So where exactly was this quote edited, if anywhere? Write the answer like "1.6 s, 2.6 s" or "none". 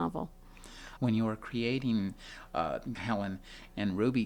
1.0 s, 2.9 s